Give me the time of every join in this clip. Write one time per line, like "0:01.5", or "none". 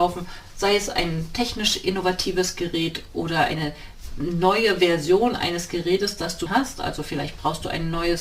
0:06.5